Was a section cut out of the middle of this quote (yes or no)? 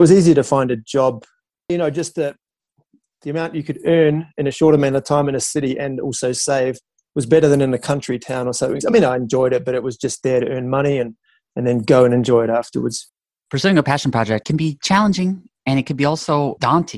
yes